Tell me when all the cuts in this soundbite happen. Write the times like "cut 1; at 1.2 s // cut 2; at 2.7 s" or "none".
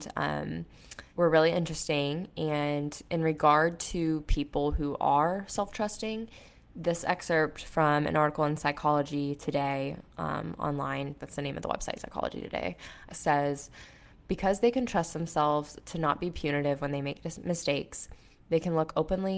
cut 1; at 1.1 s // cut 2; at 11.2 s // cut 3; at 13.1 s